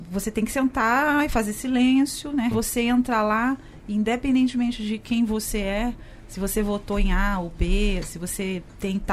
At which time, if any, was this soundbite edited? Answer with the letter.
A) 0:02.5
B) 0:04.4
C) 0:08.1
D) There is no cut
A